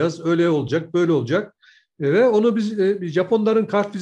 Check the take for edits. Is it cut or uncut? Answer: uncut